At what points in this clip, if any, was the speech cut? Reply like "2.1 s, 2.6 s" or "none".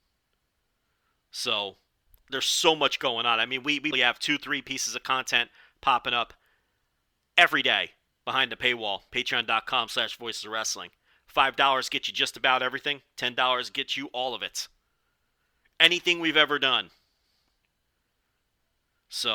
3.9 s